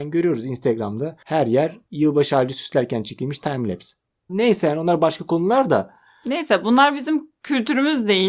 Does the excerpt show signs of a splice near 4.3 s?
yes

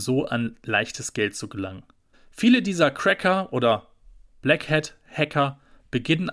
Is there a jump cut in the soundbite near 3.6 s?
no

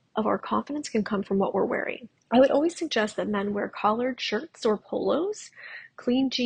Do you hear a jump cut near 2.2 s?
yes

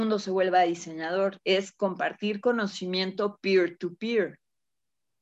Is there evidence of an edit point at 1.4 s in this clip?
yes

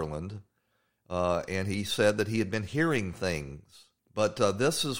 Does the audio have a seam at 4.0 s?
yes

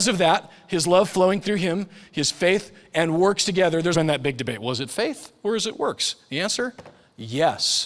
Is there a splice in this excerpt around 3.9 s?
yes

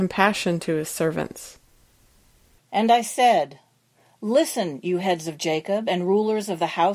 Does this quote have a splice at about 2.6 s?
yes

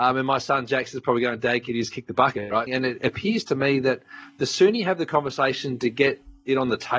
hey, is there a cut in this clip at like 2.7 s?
yes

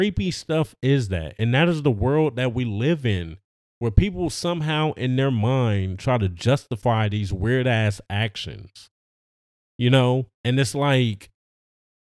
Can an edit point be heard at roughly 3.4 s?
no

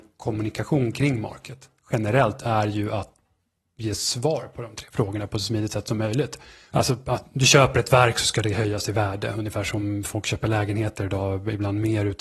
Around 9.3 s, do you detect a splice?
no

